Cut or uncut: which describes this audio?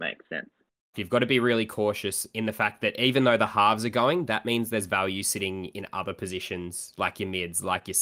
cut